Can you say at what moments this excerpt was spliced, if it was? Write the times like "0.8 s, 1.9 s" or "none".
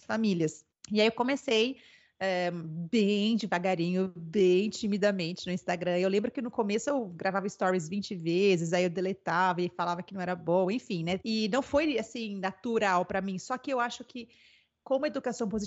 11.2 s